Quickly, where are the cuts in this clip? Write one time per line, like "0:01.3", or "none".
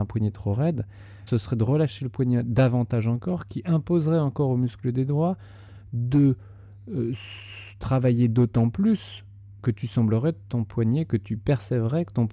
0:01.3